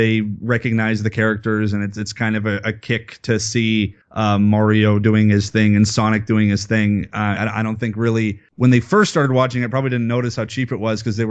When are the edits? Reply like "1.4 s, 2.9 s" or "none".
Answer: 7.4 s